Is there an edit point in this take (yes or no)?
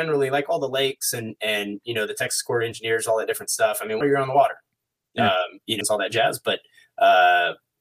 yes